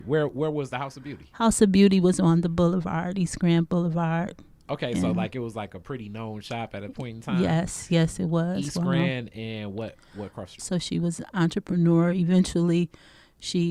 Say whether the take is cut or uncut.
cut